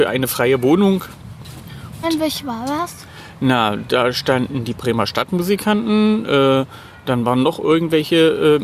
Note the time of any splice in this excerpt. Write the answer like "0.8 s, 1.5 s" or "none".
2.0 s